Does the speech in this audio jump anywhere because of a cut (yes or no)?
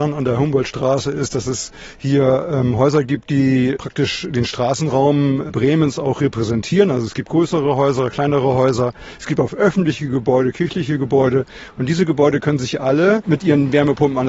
no